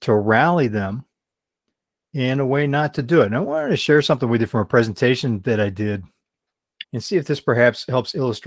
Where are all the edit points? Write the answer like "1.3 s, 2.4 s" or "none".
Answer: 6.8 s